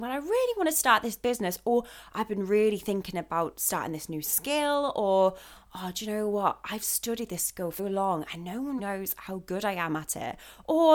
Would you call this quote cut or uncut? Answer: cut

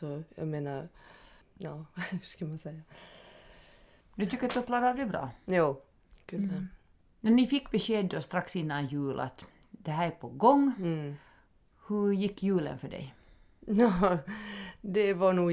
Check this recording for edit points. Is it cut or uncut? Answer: uncut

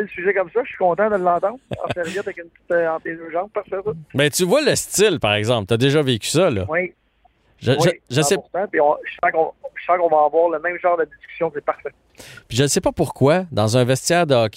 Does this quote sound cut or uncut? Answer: uncut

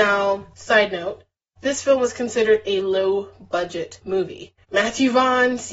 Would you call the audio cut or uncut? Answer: uncut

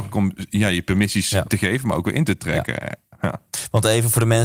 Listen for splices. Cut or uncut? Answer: uncut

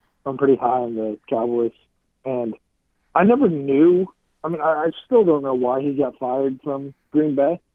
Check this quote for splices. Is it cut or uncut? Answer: uncut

